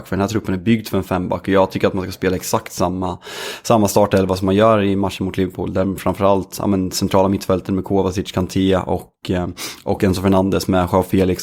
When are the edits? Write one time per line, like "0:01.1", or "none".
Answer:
none